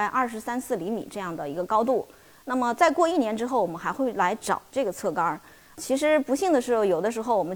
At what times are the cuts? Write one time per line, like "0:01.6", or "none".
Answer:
0:05.6